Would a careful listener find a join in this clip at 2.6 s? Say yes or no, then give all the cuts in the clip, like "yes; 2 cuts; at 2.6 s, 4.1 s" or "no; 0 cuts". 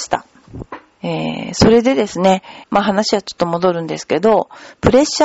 yes; 2 cuts; at 1.0 s, 2.6 s